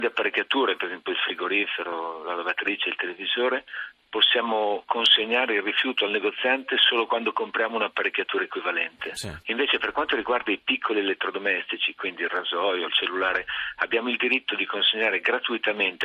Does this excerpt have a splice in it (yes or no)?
yes